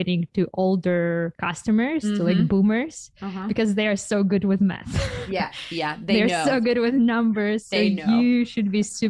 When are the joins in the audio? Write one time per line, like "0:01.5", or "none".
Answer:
none